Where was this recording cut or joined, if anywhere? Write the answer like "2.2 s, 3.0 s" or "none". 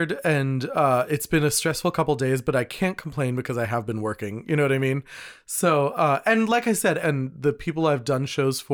7.0 s